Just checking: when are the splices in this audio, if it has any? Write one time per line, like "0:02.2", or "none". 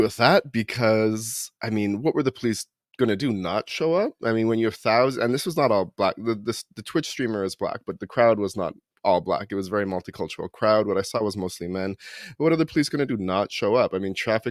none